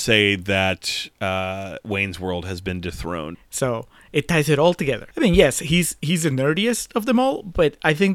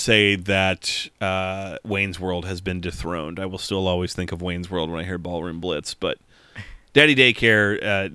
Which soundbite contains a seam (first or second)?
first